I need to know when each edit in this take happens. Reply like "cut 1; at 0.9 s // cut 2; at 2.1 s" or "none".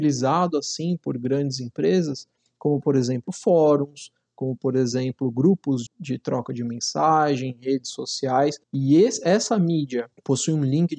cut 1; at 5.9 s // cut 2; at 8.6 s